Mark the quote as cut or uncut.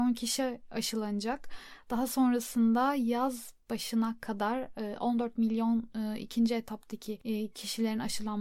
uncut